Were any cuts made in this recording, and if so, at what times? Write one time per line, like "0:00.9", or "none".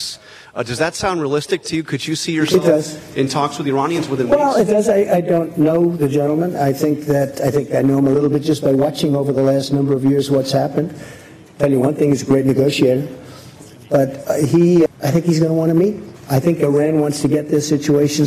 0:14.9